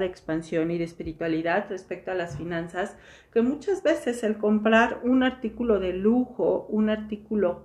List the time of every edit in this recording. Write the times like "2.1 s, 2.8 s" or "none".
none